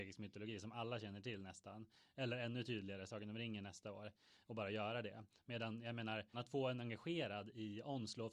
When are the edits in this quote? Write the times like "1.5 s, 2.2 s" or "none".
6.3 s